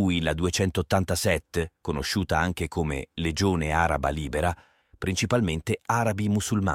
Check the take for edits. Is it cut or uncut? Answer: cut